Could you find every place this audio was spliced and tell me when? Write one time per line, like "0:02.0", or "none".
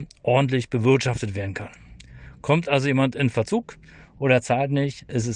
none